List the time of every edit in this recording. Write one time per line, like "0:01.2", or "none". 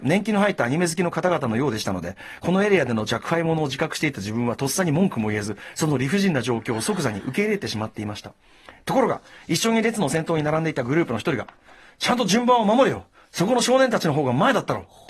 none